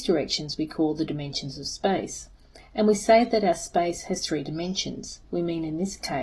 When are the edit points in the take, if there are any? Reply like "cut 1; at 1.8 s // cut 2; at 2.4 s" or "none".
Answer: cut 1; at 5.3 s